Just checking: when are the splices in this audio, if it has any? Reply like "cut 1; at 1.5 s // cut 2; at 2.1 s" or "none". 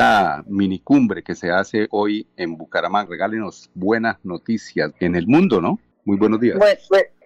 cut 1; at 3.1 s // cut 2; at 4.9 s